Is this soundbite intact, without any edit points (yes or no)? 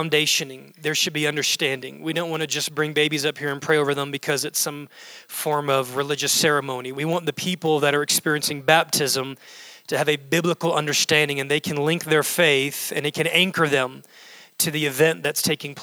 no